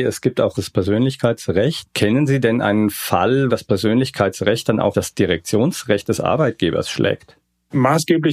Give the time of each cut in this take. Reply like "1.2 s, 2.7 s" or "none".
3.5 s, 4.9 s

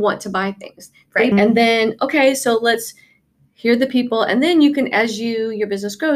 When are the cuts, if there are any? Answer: 1.3 s

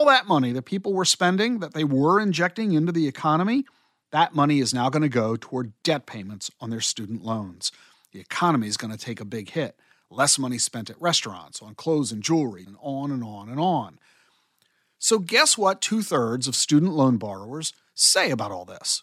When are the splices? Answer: 12.7 s

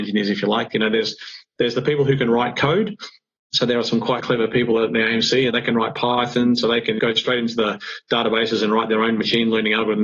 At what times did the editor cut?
none

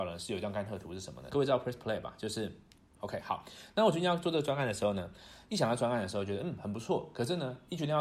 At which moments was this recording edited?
1.3 s, 3.0 s

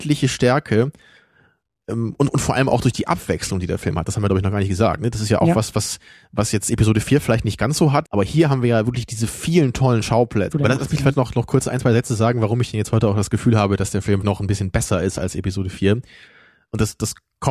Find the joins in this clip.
8.0 s, 10.5 s, 14.2 s

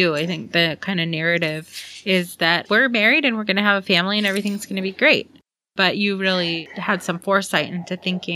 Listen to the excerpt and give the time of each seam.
2.7 s

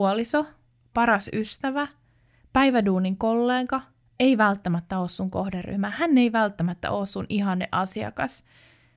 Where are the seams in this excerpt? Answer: none

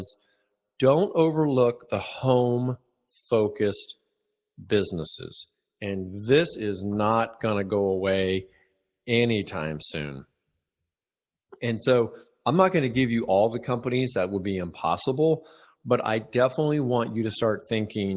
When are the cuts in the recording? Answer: none

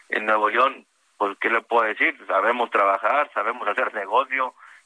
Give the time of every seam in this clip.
none

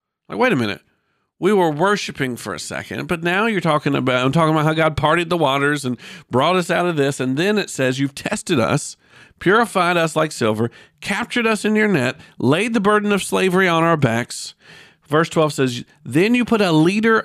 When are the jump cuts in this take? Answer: none

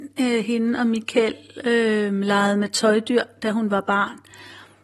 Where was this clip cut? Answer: none

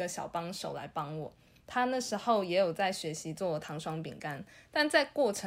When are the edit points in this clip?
none

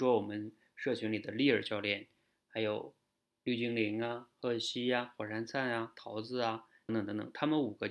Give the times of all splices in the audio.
6.9 s

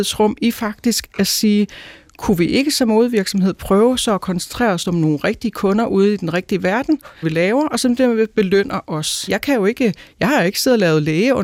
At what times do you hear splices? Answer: 7.2 s, 9.3 s

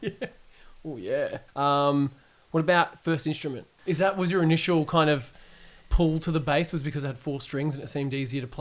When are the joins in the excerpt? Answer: 1.5 s, 3.8 s

